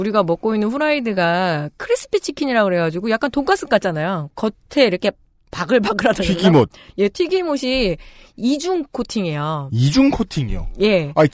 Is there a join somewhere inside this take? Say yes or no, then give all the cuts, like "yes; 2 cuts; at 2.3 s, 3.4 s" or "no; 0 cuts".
no; 0 cuts